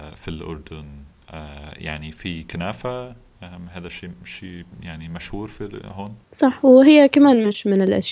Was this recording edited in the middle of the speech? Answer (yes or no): yes